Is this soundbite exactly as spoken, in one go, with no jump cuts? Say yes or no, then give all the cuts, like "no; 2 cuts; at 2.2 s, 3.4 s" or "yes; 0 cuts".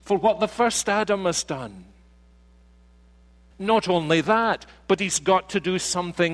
no; 1 cut; at 3.5 s